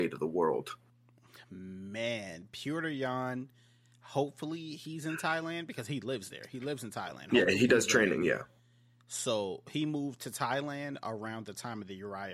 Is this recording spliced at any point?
no; 0 cuts

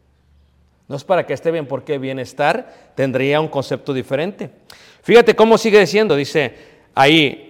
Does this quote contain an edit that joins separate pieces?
no; 0 cuts

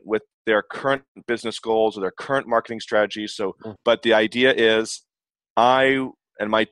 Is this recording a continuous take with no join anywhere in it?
no; 1 cut; at 3.8 s

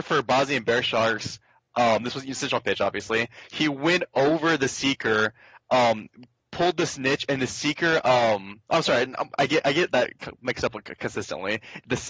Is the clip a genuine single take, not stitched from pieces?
yes; 0 cuts

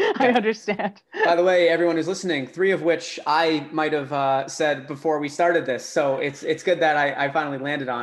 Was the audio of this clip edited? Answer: no; 0 cuts

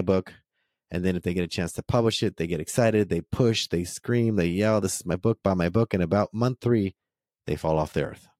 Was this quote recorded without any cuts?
yes; 0 cuts

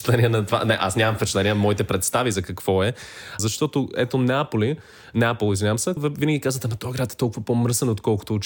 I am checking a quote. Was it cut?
yes; 2 cuts; at 3.4 s, 6.0 s

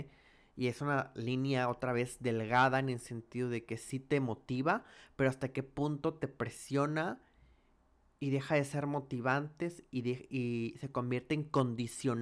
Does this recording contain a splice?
no; 0 cuts

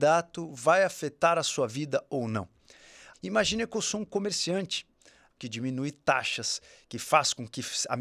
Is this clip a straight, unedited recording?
no; 2 cuts; at 3.1 s, 5.3 s

